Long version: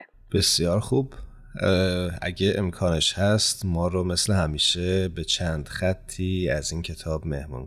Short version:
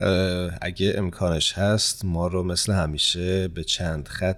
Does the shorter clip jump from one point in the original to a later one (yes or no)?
no